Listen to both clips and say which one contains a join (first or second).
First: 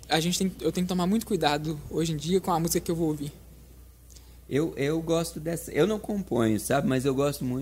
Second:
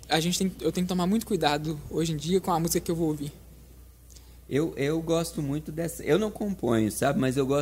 first